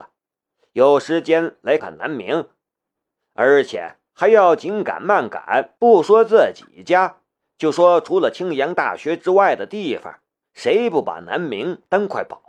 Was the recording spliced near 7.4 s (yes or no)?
no